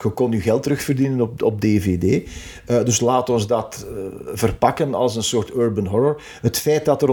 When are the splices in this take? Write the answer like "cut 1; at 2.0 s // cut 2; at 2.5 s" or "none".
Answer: none